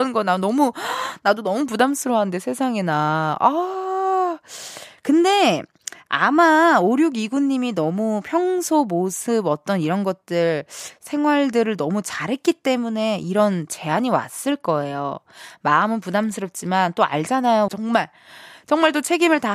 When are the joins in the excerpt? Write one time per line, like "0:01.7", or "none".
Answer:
0:17.7